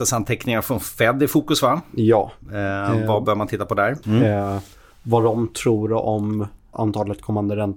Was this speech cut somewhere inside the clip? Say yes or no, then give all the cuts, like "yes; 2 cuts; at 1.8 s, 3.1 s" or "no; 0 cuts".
yes; 2 cuts; at 4.0 s, 6.7 s